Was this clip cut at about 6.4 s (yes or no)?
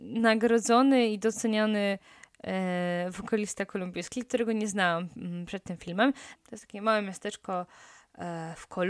yes